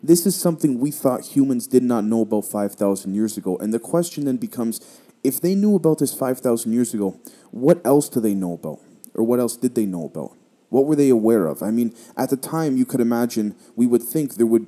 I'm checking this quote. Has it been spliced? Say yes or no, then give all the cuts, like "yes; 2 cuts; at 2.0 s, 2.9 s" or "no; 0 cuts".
no; 0 cuts